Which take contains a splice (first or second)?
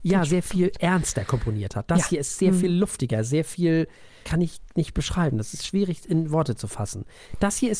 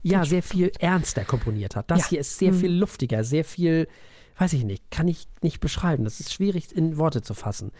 first